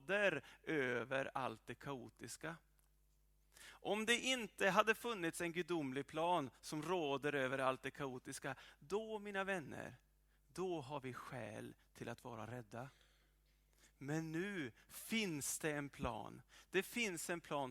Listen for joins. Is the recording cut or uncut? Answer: uncut